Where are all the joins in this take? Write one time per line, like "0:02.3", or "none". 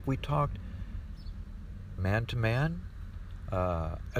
0:02.0

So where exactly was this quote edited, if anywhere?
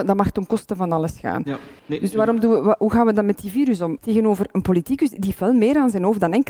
0:01.8
0:04.0

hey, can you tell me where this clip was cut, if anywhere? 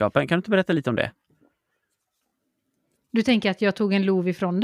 none

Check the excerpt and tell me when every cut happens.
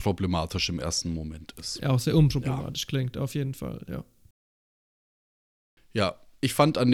none

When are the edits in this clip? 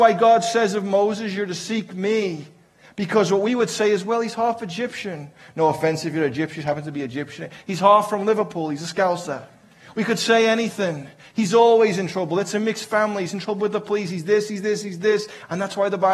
none

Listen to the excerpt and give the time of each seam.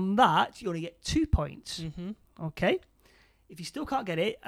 none

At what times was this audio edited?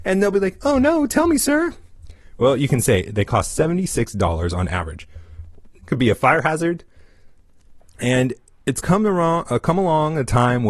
0:05.8
0:07.8

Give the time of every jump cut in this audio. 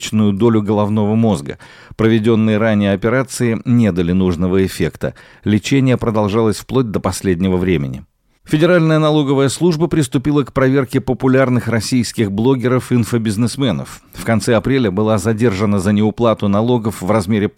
none

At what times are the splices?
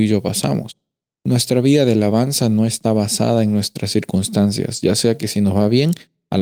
0:01.2

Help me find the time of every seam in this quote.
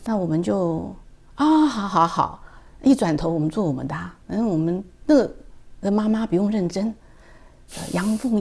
0:04.2
0:05.8

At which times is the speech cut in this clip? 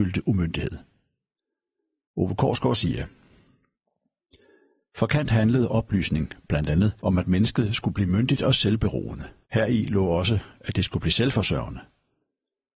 0:07.0
0:09.4

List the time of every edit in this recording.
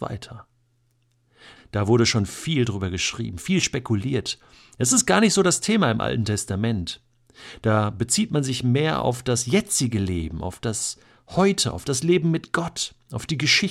0:01.6

